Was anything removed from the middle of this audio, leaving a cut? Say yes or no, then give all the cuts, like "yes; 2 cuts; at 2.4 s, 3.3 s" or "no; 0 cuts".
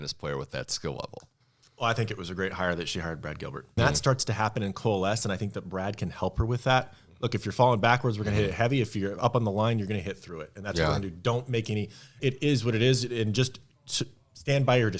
yes; 2 cuts; at 3.8 s, 12.2 s